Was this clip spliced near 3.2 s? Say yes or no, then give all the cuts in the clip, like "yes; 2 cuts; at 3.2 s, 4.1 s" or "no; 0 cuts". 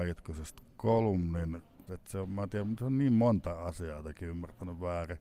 no; 1 cut; at 1.9 s